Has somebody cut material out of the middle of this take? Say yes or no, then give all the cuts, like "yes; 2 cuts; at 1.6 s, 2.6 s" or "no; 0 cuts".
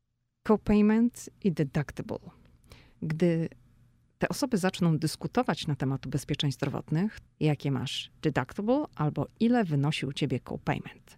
yes; 2 cuts; at 2.9 s, 7.2 s